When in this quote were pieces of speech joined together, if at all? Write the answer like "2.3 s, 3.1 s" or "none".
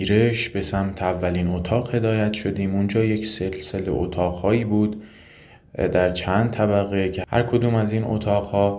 none